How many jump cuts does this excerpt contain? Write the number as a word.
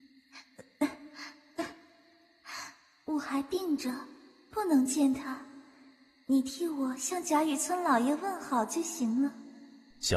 zero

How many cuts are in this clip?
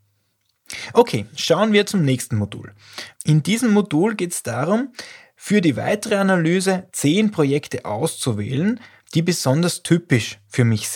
one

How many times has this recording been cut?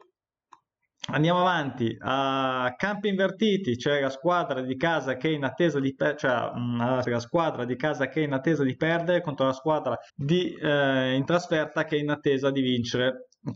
two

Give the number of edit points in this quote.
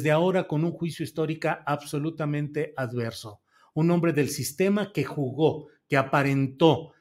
zero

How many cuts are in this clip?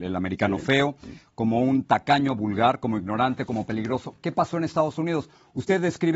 zero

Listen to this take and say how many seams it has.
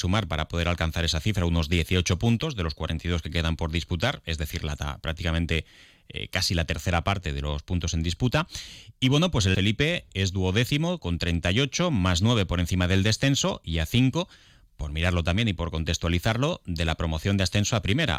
one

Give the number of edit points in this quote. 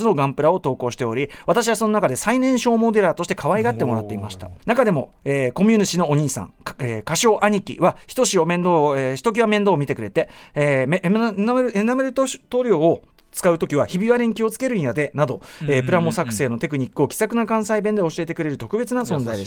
one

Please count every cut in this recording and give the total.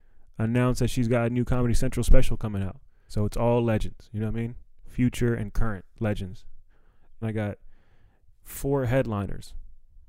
two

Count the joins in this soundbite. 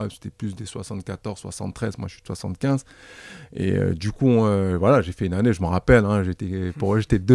zero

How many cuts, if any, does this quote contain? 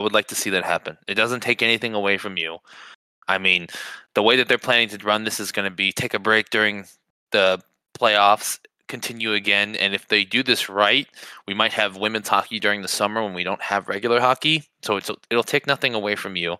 zero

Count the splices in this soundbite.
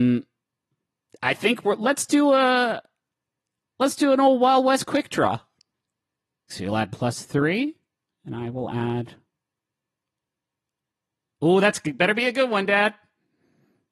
one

